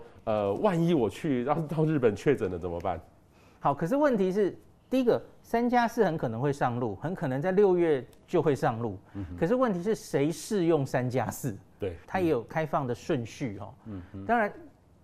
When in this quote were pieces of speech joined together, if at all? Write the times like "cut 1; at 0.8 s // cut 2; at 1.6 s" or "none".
cut 1; at 3.6 s // cut 2; at 12.0 s